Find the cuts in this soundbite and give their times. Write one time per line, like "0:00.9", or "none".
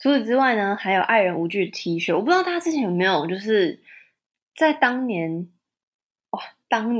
none